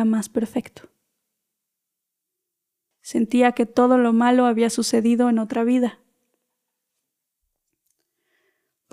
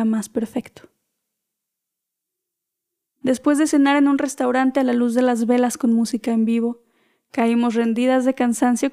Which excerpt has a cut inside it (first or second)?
first